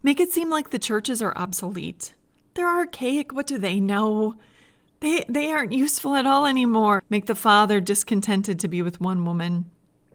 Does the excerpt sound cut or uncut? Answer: cut